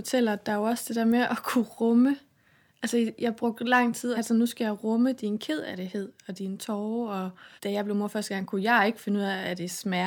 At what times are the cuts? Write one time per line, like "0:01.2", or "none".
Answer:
0:04.1
0:07.6